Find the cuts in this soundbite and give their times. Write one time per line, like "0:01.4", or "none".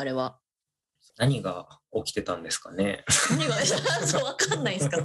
0:01.1